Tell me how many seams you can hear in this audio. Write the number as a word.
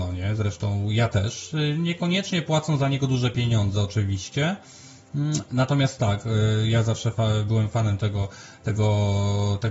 zero